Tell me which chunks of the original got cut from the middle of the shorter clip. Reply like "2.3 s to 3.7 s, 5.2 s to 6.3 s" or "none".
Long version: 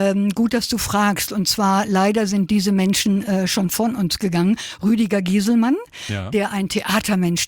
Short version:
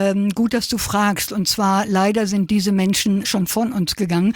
3.2 s to 3.5 s